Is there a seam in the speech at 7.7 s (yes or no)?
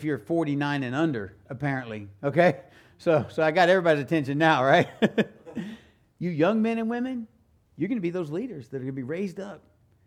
yes